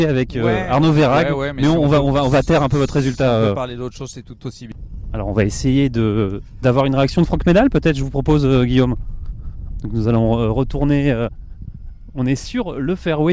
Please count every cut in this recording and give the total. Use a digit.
0